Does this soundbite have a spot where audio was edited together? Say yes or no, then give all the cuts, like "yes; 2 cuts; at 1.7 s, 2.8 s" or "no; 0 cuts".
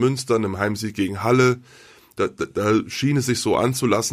no; 0 cuts